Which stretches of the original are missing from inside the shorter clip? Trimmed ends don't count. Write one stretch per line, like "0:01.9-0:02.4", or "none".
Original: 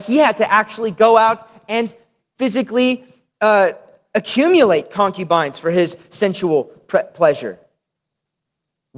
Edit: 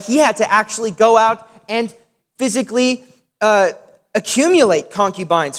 none